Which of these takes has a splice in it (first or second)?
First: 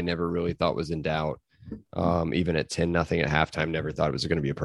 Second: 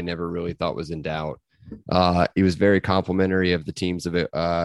second